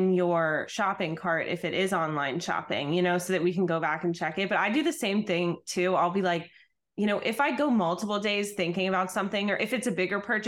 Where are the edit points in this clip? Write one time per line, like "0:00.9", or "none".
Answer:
none